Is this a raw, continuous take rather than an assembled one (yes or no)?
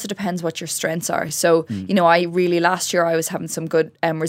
yes